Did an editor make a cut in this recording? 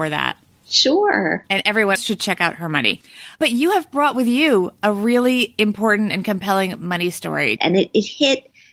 yes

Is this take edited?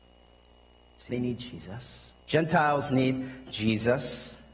yes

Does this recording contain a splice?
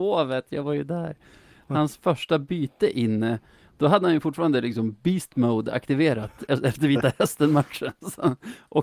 yes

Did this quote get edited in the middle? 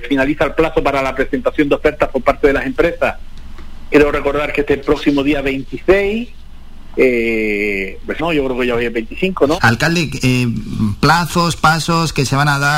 yes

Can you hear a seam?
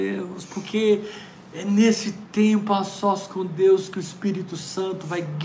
no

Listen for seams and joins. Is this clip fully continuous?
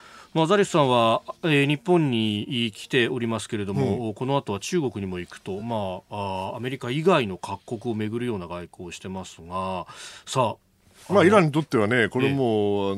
yes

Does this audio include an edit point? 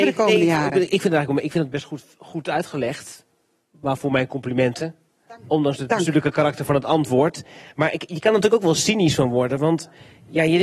no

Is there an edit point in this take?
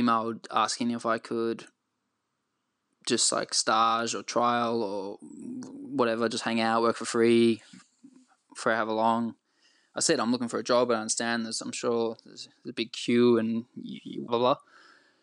yes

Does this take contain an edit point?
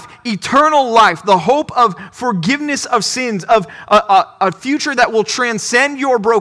no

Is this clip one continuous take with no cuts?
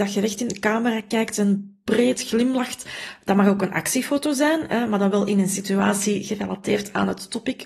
yes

